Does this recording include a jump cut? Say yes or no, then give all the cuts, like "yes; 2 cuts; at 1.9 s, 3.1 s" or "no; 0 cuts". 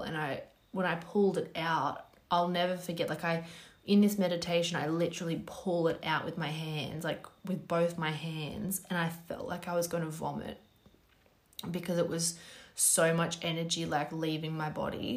no; 0 cuts